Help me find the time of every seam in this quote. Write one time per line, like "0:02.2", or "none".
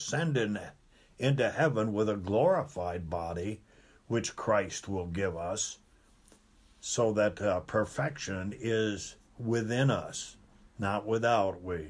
none